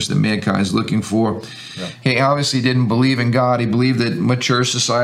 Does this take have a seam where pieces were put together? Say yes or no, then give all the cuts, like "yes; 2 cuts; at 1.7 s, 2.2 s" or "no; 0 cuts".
yes; 1 cut; at 2.0 s